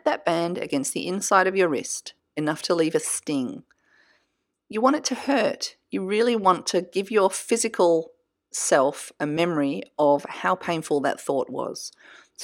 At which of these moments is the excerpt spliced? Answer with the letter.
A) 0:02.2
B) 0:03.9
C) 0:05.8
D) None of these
A